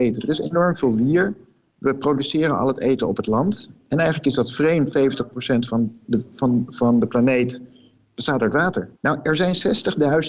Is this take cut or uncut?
cut